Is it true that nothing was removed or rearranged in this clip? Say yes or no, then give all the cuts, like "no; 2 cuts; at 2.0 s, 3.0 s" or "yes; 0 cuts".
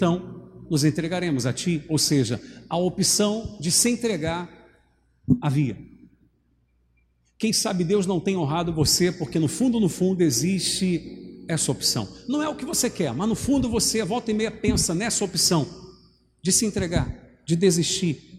yes; 0 cuts